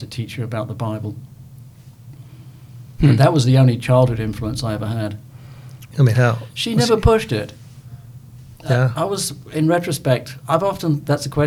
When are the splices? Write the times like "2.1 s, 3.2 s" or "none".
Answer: 5.9 s